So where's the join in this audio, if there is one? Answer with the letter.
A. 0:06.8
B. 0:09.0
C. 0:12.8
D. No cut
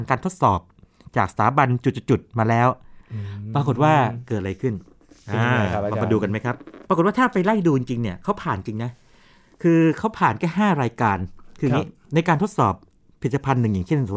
A